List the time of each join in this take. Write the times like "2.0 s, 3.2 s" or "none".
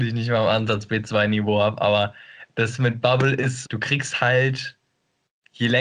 3.6 s